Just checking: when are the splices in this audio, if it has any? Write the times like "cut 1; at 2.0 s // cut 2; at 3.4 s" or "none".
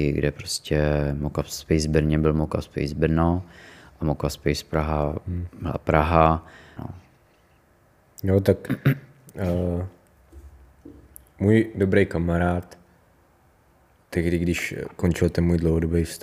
cut 1; at 6.8 s